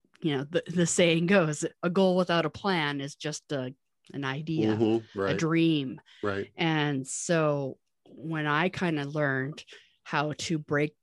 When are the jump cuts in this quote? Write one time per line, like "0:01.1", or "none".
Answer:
none